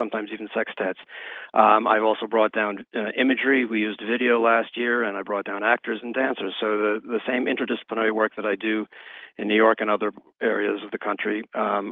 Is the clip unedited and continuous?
yes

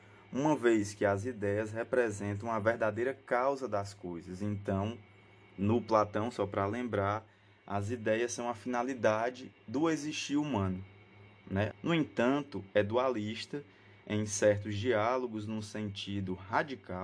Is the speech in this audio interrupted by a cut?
yes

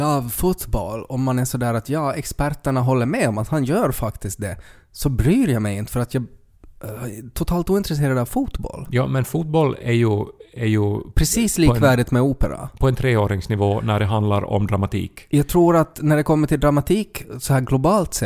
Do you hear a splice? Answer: no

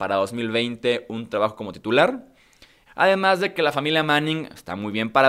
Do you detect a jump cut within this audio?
yes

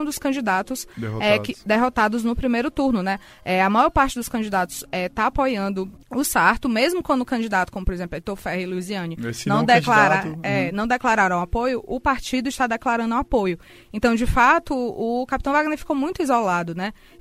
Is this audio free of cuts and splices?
yes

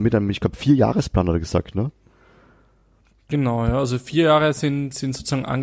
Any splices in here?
no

